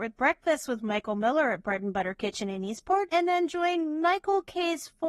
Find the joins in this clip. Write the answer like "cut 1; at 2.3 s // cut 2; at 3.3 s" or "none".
none